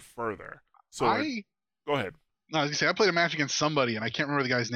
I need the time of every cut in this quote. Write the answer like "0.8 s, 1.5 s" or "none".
none